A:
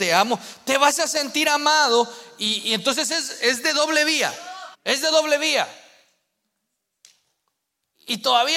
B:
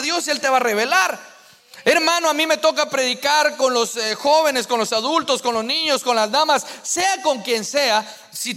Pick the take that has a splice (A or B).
A